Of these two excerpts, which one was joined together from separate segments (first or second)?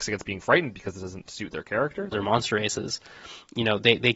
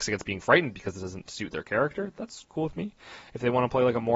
first